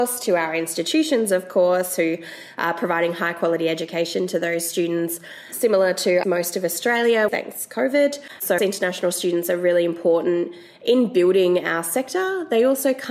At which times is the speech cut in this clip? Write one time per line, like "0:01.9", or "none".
0:06.2
0:07.3
0:08.6